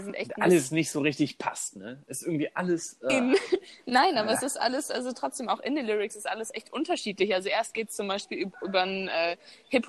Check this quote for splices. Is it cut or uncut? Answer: uncut